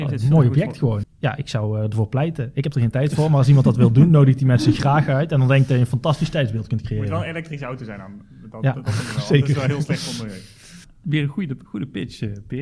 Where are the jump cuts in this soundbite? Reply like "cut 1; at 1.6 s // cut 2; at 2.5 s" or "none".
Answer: cut 1; at 1.0 s